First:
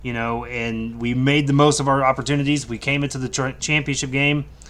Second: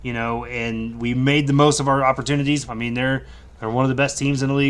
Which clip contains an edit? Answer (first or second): second